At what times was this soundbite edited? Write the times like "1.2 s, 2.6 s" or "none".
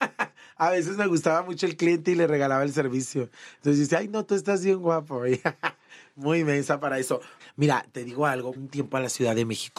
7.4 s, 8.6 s